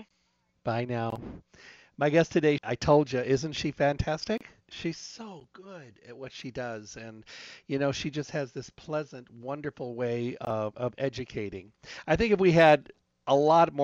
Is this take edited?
yes; 1 cut; at 2.6 s

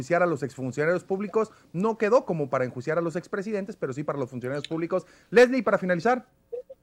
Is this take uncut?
yes; 0 cuts

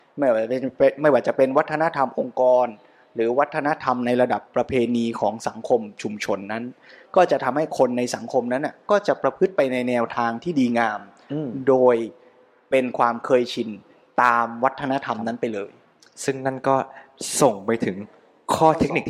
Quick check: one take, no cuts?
yes; 0 cuts

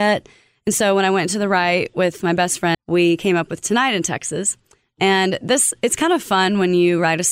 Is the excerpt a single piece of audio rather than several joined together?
no; 1 cut; at 2.7 s

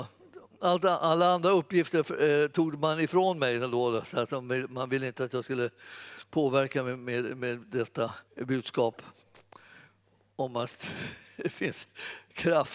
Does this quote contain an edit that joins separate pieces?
yes; 1 cut; at 8.3 s

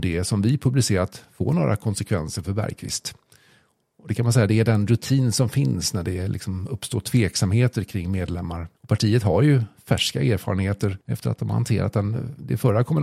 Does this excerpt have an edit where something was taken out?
yes; 2 cuts; at 8.7 s, 11.0 s

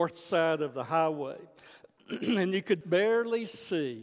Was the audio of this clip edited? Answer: yes; 1 cut; at 2.8 s

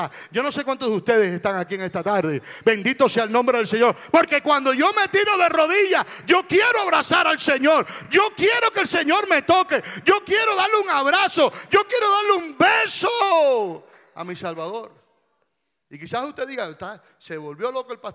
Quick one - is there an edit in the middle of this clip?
no; 0 cuts

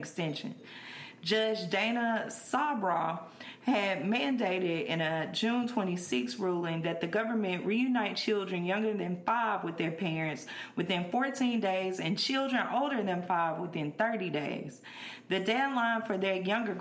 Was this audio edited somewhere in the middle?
no; 0 cuts

